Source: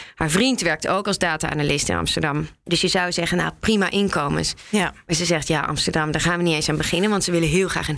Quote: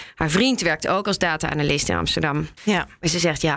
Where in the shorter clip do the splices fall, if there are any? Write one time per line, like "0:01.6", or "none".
0:02.6